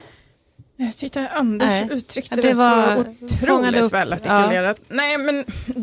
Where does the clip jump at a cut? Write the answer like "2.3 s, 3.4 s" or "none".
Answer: none